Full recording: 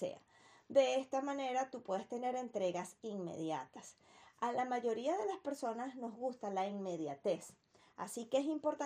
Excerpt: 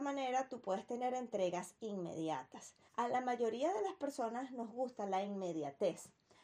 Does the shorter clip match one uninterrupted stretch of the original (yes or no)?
no